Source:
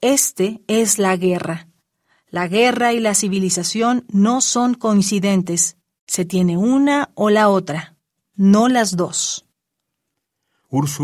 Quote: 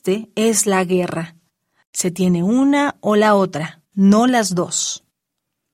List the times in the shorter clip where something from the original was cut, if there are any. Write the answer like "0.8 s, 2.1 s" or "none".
1.8 s, 3.9 s